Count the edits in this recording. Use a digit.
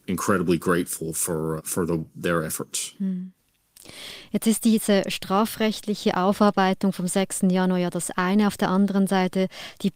1